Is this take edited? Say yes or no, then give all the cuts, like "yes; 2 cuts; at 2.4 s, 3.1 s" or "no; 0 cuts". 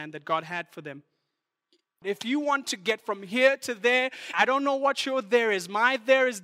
yes; 2 cuts; at 2.0 s, 4.3 s